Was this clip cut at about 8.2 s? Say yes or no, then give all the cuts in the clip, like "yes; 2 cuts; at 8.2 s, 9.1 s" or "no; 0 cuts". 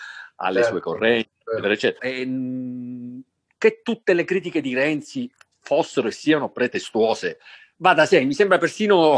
no; 1 cut; at 2.0 s